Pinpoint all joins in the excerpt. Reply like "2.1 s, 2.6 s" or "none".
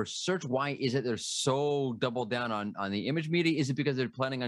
none